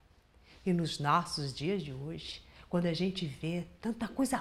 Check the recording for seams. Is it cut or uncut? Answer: uncut